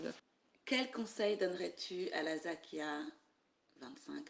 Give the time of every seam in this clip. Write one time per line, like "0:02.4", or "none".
none